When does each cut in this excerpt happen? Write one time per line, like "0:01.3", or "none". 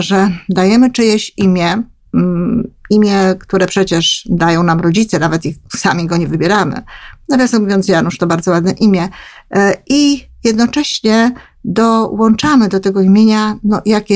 none